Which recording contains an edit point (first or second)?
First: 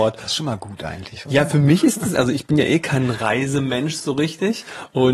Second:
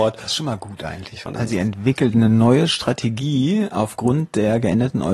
second